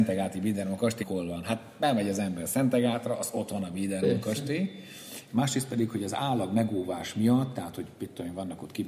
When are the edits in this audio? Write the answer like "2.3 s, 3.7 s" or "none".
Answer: 1.0 s, 5.3 s